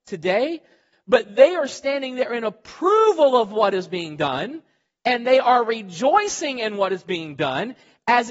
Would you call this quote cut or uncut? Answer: uncut